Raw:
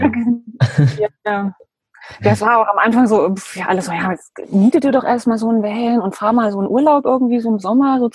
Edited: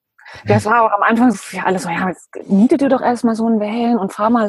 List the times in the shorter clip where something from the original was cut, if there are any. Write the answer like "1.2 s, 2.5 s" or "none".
1.3 s